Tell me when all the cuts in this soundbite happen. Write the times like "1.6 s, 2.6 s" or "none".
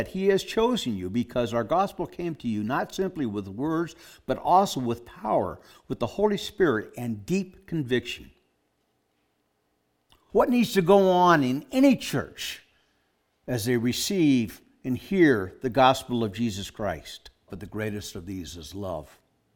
10.3 s, 17.5 s